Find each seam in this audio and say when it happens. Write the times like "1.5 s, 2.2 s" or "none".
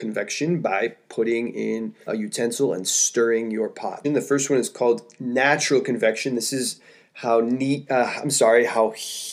2.1 s, 4.0 s